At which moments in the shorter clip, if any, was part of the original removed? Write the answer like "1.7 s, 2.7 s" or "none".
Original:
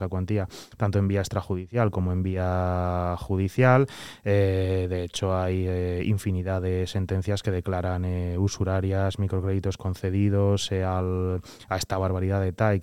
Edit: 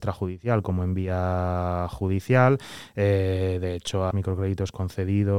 4.1 s